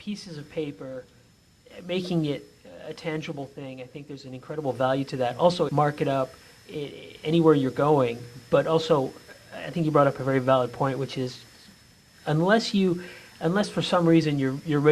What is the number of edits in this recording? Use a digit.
1